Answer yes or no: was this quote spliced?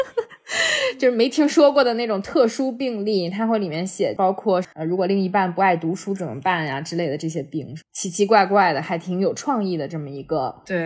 no